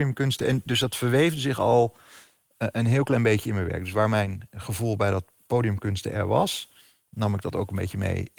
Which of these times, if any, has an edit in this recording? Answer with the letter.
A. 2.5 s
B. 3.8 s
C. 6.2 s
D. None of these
D